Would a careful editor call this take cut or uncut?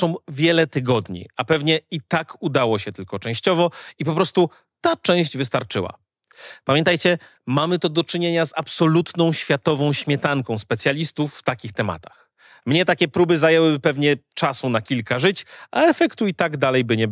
uncut